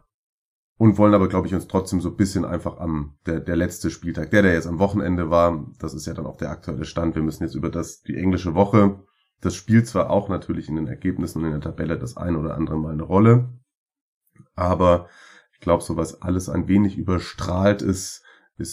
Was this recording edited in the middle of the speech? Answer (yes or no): no